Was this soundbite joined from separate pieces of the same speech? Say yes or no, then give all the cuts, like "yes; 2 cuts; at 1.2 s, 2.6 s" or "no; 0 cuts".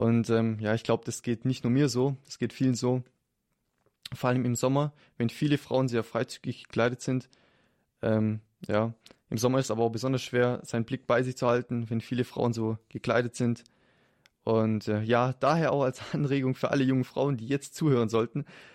no; 0 cuts